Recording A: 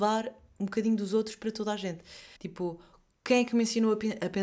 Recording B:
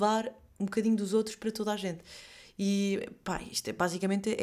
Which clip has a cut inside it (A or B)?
A